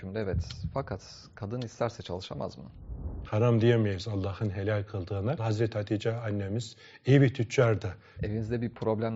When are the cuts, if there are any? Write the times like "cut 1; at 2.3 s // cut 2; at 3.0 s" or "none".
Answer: cut 1; at 3.3 s // cut 2; at 5.4 s // cut 3; at 8.2 s

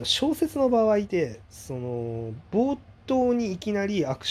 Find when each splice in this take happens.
cut 1; at 1.0 s

